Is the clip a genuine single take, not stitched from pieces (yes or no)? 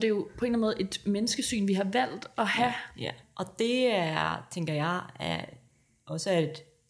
no